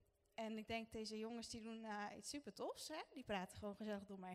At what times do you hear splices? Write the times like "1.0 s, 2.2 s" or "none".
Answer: none